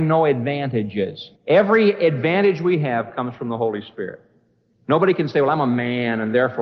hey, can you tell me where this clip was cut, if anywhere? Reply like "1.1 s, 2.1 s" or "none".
1.4 s